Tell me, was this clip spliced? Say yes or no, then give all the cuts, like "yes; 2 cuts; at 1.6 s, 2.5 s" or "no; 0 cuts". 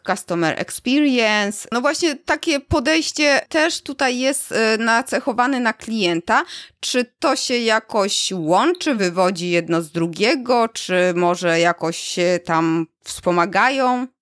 no; 0 cuts